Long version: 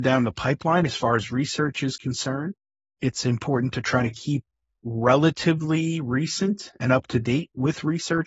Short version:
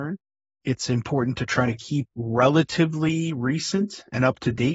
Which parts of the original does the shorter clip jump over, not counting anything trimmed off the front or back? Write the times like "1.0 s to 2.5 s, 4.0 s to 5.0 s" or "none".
4.5 s to 4.8 s